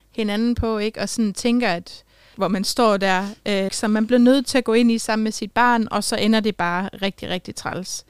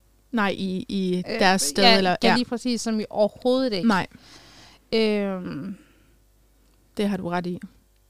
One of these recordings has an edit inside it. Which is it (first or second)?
first